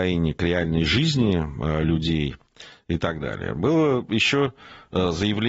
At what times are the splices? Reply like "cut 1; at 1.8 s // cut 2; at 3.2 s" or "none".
none